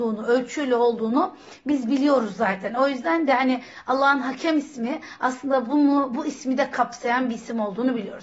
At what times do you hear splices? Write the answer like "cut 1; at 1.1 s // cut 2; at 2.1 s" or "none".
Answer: none